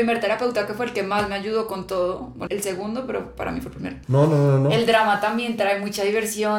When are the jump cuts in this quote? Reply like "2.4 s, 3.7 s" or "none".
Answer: 2.5 s, 4.0 s